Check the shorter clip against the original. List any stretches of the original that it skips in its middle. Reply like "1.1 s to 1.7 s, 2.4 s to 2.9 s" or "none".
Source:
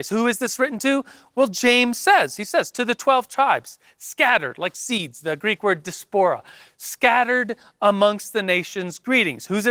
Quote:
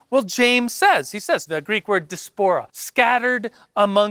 2.7 s to 5.2 s, 6.4 s to 6.7 s